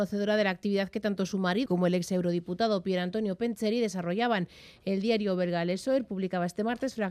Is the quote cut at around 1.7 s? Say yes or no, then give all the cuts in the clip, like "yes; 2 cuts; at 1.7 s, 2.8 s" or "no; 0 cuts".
yes; 1 cut; at 1.7 s